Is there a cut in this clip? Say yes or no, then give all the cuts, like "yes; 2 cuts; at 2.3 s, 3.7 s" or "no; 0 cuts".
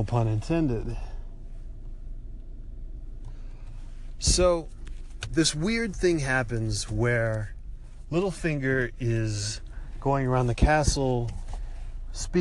no; 0 cuts